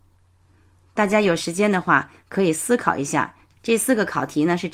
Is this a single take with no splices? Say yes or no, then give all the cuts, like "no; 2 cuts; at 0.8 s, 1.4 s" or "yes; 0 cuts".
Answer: no; 1 cut; at 3.5 s